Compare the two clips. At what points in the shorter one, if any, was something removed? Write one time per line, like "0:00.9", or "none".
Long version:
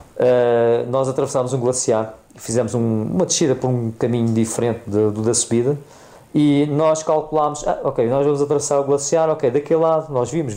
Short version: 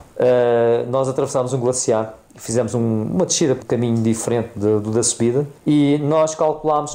0:03.6
0:05.6

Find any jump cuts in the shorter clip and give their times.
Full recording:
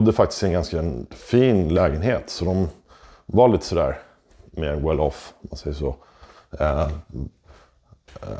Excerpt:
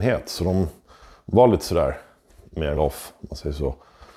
0:02.8

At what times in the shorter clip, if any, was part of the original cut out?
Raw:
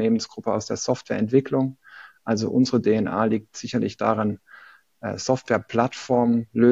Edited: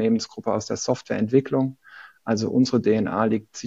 none

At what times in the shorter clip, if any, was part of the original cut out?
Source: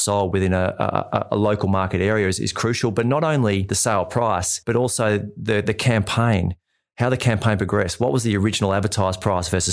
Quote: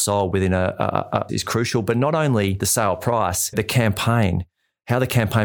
0:01.3
0:03.5

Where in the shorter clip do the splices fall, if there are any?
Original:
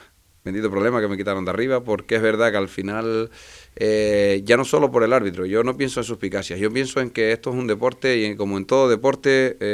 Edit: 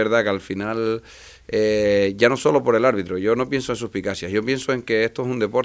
none

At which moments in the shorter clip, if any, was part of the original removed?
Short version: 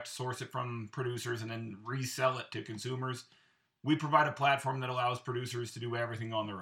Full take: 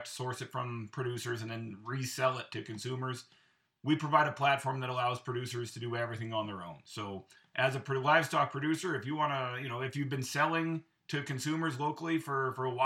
none

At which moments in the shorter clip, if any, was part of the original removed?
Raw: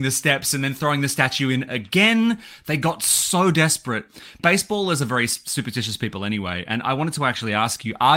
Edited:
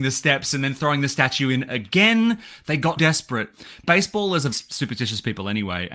0:03.0
0:04.5

